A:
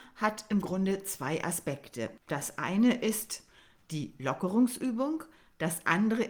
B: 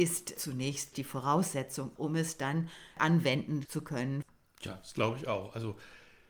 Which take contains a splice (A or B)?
A